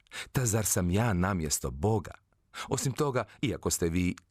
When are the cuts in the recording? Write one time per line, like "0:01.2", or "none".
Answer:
none